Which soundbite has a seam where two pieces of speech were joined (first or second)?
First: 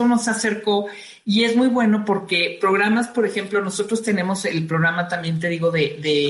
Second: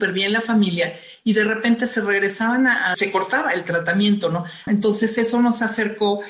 second